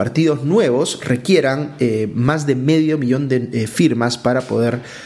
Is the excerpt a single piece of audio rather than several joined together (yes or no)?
yes